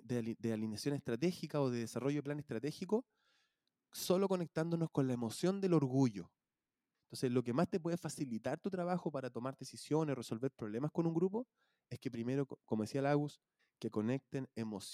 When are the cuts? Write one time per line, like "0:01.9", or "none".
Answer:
0:06.9
0:13.6